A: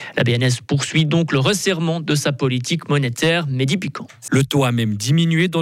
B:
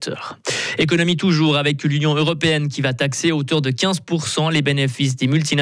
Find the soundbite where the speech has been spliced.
A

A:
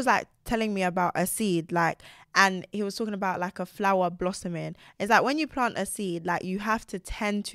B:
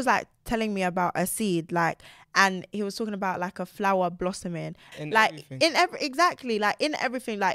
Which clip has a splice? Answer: B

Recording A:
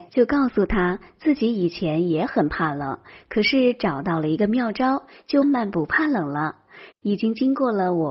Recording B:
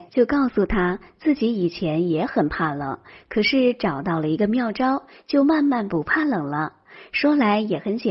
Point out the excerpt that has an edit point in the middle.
A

